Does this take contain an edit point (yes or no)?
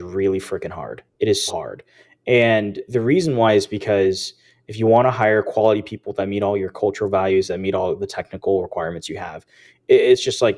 yes